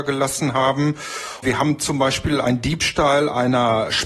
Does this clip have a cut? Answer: no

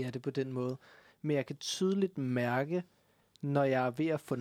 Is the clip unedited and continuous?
yes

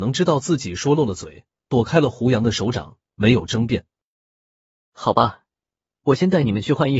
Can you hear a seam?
yes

